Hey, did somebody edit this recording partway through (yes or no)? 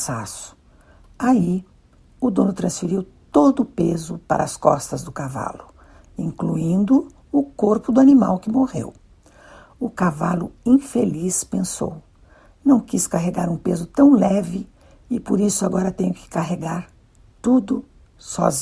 no